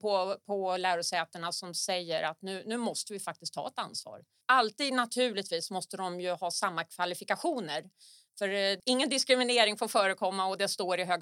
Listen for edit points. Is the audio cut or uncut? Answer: cut